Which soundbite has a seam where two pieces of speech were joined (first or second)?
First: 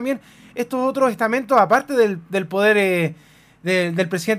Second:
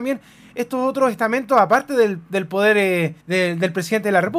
second